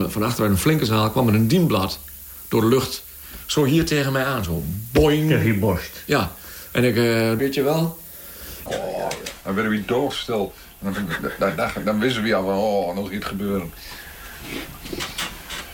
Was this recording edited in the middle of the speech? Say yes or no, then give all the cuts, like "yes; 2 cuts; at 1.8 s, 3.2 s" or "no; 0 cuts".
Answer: yes; 2 cuts; at 7.4 s, 8.7 s